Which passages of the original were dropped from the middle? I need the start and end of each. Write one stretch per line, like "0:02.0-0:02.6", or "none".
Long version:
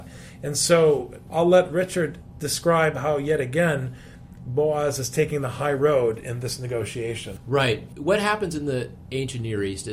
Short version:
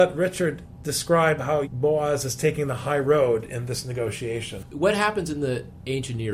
0:03.2-0:04.4
0:07.4-0:07.9